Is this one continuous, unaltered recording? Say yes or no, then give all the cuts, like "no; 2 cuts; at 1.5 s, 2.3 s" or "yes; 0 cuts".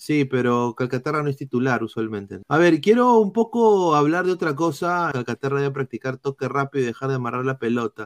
no; 2 cuts; at 2.4 s, 5.1 s